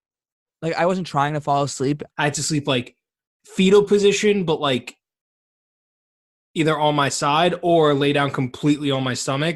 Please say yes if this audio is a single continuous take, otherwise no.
no